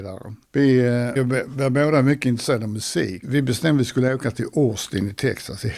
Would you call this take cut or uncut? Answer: cut